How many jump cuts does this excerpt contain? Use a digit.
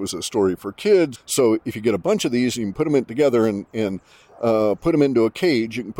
1